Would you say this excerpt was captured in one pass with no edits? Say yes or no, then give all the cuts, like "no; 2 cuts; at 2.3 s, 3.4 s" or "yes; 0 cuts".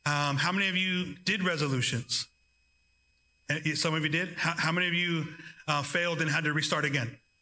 yes; 0 cuts